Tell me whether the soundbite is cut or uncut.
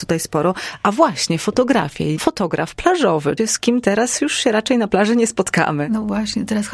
cut